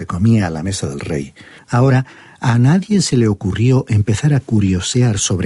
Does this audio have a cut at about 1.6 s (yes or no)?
yes